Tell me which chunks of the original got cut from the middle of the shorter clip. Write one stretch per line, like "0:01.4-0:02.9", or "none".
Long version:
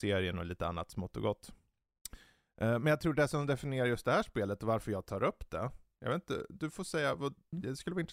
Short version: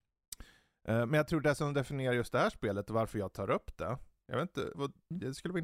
0:06.5-0:07.2